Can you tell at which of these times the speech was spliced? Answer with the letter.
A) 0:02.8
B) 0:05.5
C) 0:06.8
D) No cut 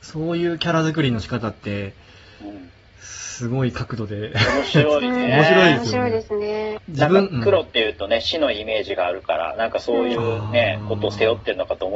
C